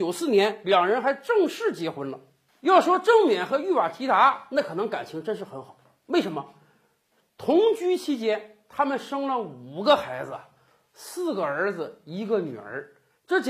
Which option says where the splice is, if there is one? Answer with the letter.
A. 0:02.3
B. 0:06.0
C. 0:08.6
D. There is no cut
D